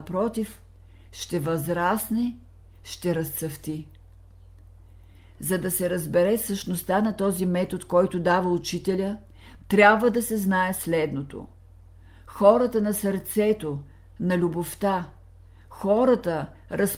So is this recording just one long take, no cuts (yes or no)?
yes